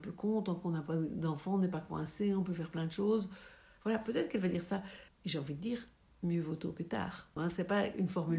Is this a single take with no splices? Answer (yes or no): no